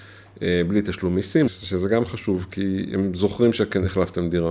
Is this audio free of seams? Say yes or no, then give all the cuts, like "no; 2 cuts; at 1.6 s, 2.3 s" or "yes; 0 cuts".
no; 1 cut; at 1.5 s